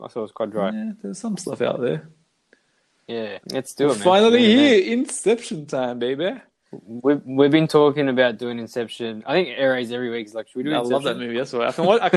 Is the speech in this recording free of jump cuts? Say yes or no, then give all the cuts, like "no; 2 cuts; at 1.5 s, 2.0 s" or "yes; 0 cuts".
no; 1 cut; at 3.4 s